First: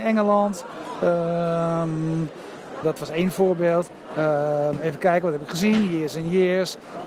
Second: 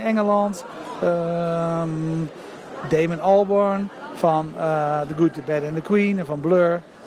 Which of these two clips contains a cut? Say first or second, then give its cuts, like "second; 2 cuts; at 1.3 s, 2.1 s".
first; 2 cuts; at 2.8 s, 4.1 s